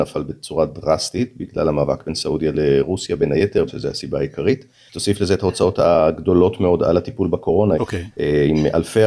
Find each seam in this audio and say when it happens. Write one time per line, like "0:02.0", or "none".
0:03.7
0:07.8